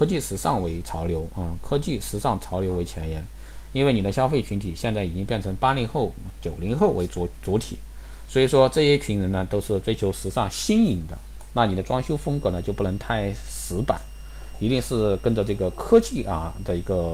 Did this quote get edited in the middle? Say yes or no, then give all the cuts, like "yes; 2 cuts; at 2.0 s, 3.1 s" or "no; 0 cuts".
yes; 1 cut; at 10.5 s